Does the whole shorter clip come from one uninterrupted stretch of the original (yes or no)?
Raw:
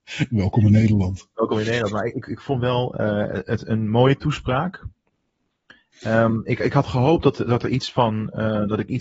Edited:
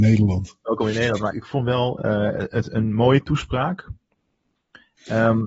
no